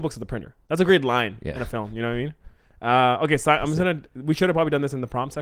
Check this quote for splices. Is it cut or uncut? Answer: uncut